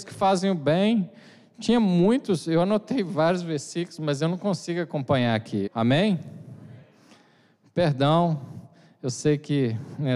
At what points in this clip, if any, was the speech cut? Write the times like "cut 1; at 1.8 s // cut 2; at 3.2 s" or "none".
cut 1; at 5.7 s